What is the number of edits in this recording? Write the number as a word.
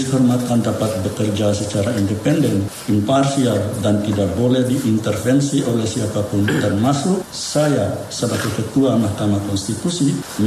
zero